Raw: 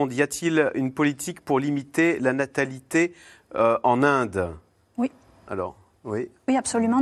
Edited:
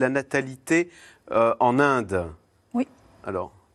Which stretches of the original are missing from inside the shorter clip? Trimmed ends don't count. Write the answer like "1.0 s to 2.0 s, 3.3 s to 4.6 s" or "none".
none

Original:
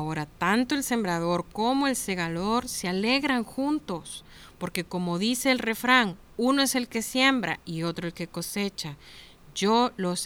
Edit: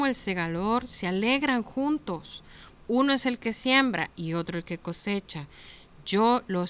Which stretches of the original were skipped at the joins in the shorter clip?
4.6 s to 6.3 s

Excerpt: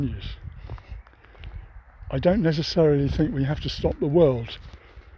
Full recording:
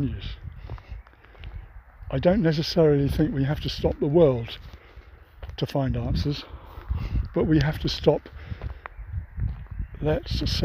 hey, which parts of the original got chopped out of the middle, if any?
none

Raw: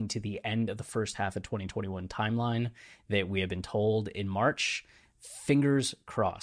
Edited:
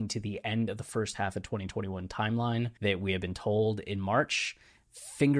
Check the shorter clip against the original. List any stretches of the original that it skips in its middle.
2.8 s to 3.0 s

